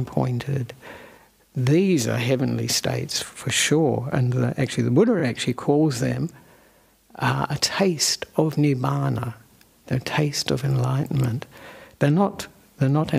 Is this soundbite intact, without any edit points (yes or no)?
yes